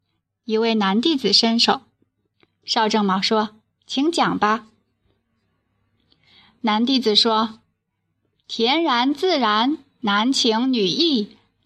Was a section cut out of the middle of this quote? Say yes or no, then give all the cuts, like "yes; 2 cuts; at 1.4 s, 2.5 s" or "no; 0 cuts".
no; 0 cuts